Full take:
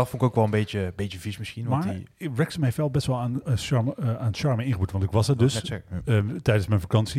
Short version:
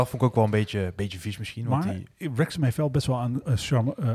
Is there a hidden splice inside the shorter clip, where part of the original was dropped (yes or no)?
no